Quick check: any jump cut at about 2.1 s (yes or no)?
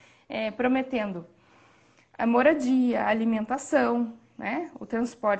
no